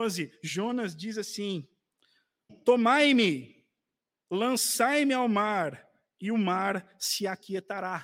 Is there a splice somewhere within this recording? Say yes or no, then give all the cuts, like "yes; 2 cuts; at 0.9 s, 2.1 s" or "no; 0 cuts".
yes; 1 cut; at 2.5 s